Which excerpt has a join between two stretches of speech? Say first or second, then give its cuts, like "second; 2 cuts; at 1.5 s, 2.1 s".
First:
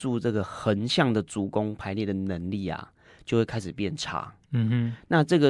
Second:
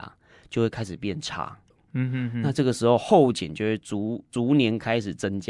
second; 1 cut; at 1.7 s